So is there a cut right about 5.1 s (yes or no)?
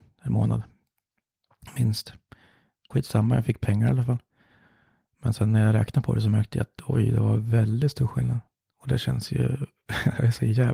no